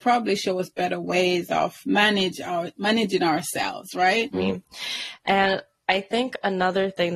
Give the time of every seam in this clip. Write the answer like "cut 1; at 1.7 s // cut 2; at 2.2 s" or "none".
cut 1; at 1.8 s // cut 2; at 4.3 s

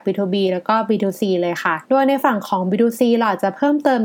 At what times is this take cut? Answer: cut 1; at 1.8 s

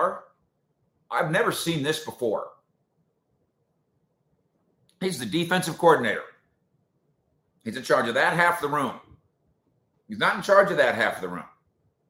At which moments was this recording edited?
none

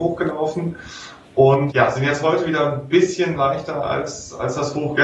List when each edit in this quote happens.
cut 1; at 1.7 s

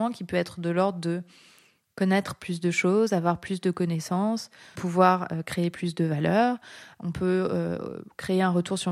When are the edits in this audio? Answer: cut 1; at 4.8 s

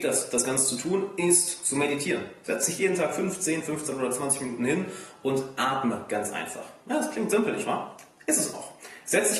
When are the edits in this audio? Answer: none

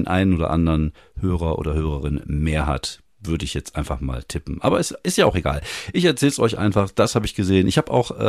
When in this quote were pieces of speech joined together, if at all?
none

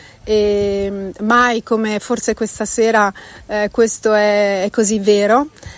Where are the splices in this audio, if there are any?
none

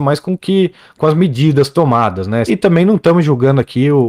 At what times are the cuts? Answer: cut 1; at 2.5 s

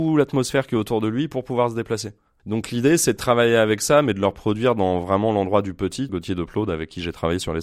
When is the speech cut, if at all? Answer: cut 1; at 2.4 s // cut 2; at 6.1 s

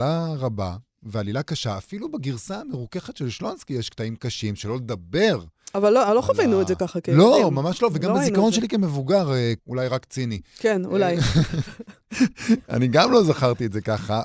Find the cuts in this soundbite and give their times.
cut 1; at 9.6 s

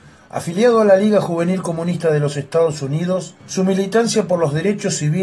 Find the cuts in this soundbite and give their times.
cut 1; at 3.4 s

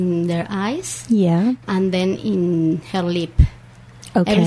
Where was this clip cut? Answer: cut 1; at 1.6 s

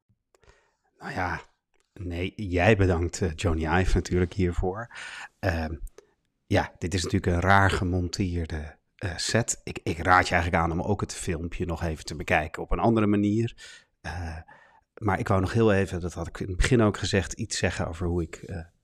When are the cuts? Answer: none

